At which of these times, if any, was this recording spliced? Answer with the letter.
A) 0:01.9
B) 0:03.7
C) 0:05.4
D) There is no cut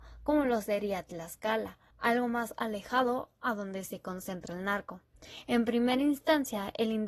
A